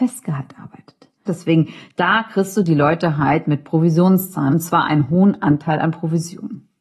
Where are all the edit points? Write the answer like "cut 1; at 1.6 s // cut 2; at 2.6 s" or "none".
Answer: cut 1; at 1.3 s